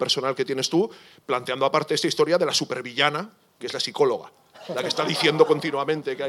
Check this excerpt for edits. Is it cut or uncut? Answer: uncut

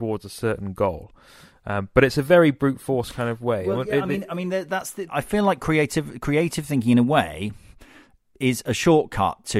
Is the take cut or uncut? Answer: cut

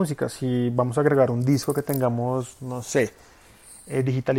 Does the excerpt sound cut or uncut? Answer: uncut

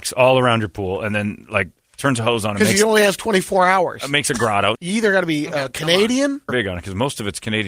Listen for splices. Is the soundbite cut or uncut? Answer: cut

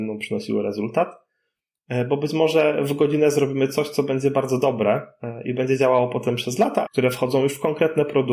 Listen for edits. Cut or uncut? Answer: cut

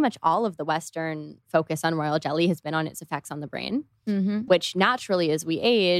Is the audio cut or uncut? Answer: cut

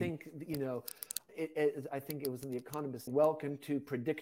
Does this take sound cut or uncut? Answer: cut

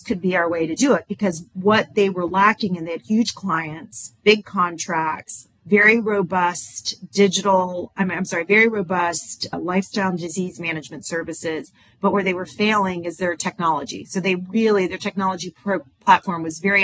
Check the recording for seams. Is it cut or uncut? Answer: uncut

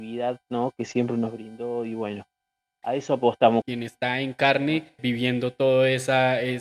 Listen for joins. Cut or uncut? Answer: cut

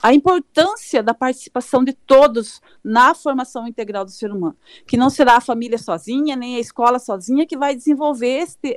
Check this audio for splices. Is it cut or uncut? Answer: uncut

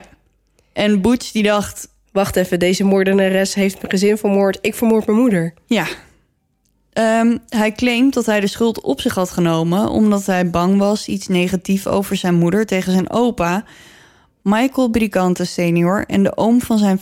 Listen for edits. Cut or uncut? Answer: uncut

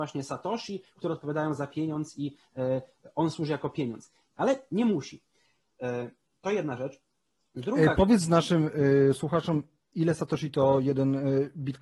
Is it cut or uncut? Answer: uncut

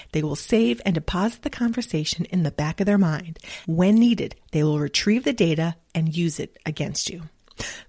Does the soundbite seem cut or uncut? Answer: cut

